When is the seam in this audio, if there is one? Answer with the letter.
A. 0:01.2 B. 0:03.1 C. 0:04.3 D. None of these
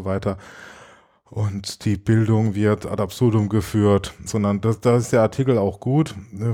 C